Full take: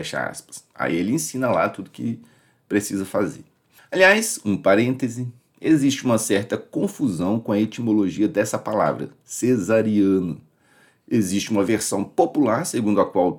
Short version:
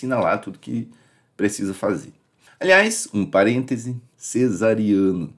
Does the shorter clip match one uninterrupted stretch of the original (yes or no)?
no